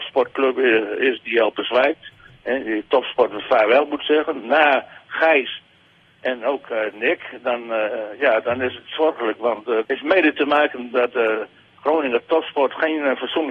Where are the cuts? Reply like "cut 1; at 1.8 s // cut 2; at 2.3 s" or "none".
cut 1; at 9.8 s